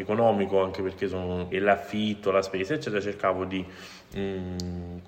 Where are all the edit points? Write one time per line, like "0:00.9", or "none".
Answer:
0:01.5